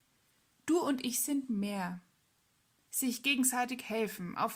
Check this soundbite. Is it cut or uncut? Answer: cut